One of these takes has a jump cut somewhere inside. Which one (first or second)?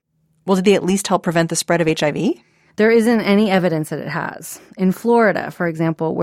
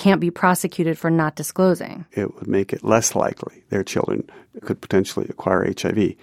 second